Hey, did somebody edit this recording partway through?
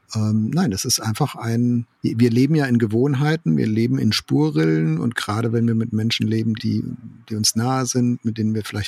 yes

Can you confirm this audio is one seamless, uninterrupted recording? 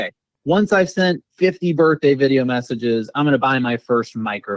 yes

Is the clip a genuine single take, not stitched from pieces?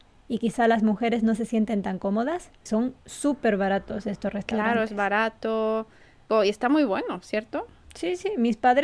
no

